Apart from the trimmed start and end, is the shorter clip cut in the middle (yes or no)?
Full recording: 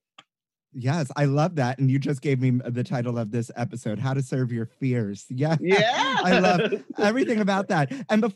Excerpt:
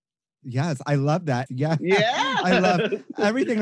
yes